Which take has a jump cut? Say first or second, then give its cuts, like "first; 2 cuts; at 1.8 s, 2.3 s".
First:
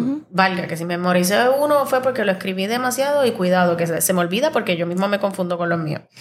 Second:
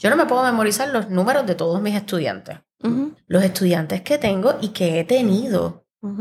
second; 1 cut; at 3.2 s